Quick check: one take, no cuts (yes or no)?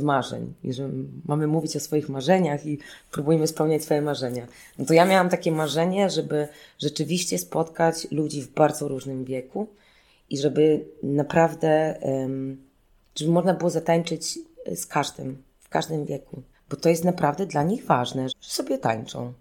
no